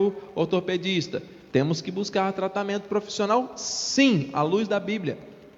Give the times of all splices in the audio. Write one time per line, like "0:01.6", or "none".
0:01.5